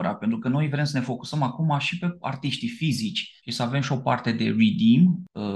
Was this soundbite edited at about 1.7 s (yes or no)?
no